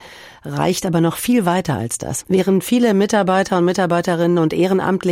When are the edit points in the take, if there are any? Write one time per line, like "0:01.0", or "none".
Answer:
0:02.2